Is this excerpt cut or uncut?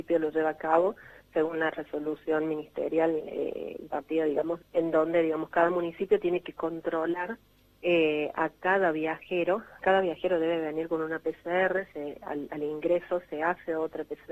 cut